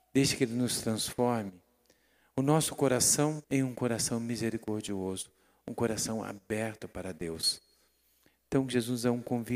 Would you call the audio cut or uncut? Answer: cut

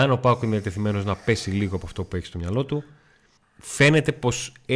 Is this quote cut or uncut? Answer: cut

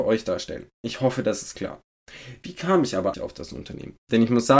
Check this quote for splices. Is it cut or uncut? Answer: cut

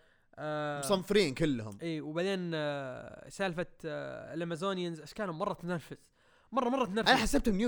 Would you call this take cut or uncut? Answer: uncut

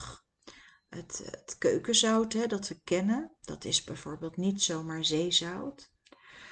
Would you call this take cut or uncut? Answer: uncut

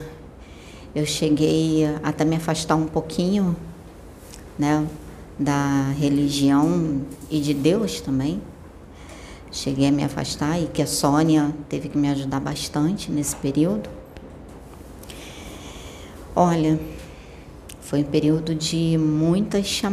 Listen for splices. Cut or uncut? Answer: uncut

